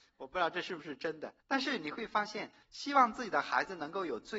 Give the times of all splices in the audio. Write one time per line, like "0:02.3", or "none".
0:01.4
0:02.6